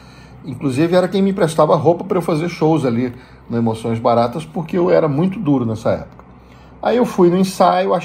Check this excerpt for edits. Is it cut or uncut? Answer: uncut